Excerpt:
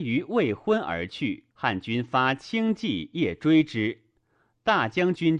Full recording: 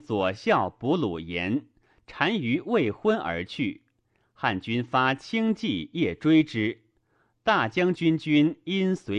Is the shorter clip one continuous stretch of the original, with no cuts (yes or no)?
no